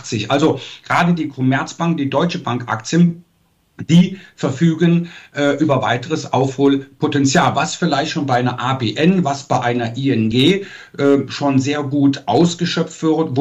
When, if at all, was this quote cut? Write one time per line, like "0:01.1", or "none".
none